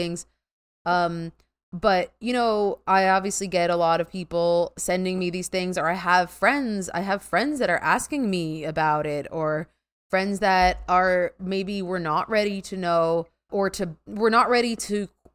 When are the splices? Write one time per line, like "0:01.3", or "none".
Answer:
0:13.5